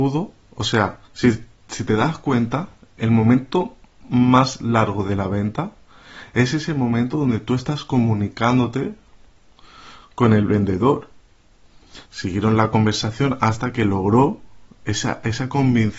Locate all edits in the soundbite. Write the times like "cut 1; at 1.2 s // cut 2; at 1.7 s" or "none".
cut 1; at 1.1 s // cut 2; at 3.0 s // cut 3; at 12.0 s